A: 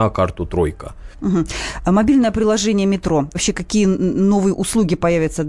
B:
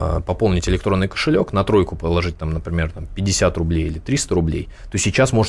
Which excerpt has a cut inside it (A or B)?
A